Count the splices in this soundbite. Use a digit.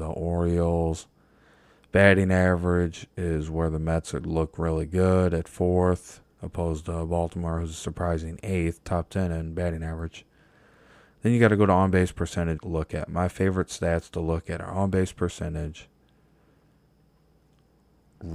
1